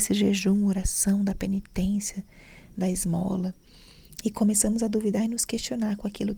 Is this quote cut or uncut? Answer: cut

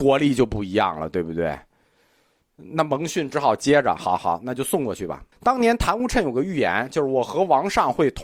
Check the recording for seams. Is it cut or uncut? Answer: cut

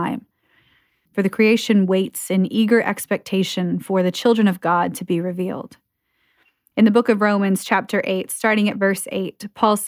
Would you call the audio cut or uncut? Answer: cut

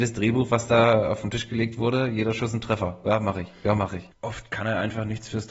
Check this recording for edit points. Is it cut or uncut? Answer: cut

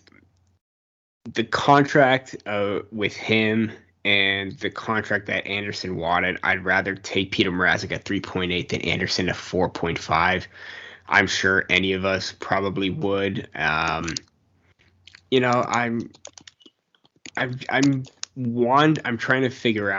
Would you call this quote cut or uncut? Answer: uncut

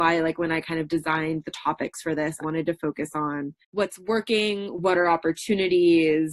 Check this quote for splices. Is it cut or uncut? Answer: cut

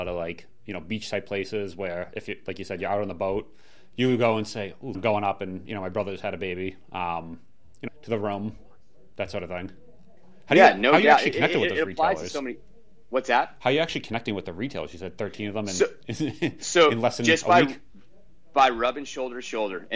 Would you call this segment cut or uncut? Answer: cut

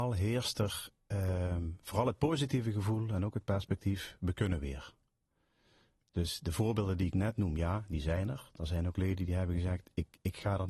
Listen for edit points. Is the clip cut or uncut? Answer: uncut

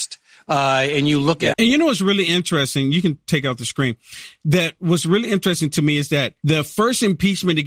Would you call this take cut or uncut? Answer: cut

